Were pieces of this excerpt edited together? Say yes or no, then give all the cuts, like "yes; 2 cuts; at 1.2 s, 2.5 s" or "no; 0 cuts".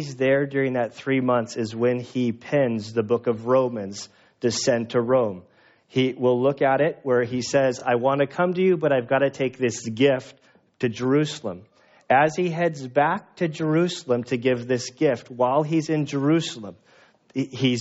no; 0 cuts